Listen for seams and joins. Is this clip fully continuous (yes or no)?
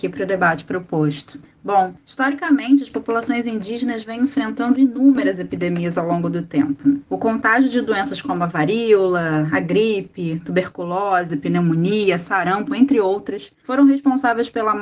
yes